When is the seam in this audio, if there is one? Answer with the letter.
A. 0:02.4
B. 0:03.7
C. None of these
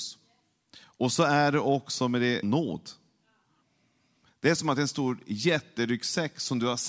A